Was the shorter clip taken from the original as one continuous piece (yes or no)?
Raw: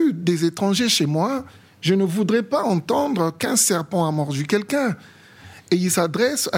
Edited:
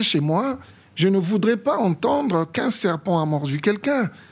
yes